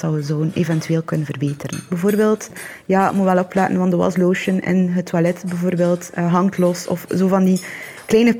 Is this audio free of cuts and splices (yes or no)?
yes